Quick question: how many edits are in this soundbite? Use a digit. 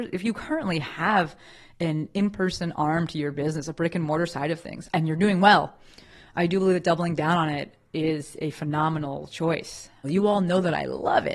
2